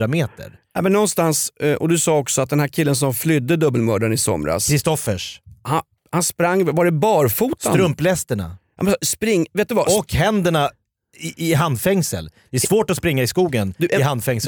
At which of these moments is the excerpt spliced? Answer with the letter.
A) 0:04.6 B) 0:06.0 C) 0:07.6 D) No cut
B